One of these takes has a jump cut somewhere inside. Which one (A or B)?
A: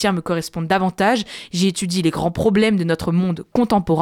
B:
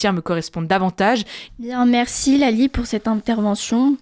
B